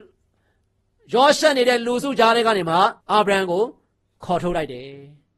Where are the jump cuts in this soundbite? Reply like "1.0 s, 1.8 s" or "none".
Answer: 3.0 s